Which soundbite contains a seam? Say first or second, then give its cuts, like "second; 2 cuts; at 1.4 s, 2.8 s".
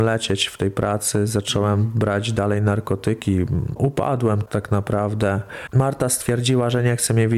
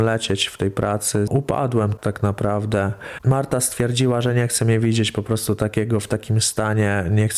second; 1 cut; at 1.3 s